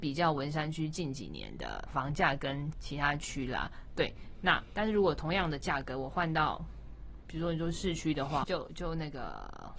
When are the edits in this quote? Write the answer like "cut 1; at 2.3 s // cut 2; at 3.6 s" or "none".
cut 1; at 1.9 s // cut 2; at 3.9 s // cut 3; at 8.4 s